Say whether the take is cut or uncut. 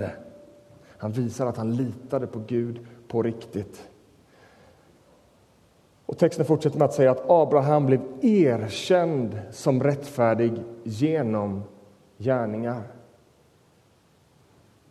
uncut